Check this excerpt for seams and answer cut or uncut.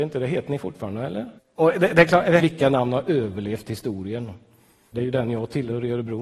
cut